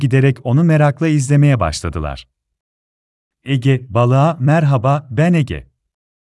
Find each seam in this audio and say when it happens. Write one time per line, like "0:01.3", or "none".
none